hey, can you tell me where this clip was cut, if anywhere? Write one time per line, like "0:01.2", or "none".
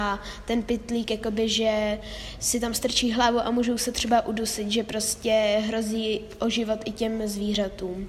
none